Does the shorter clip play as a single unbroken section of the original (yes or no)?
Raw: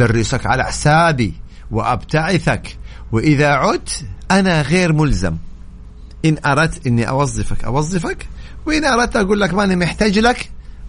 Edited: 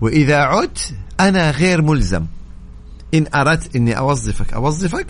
yes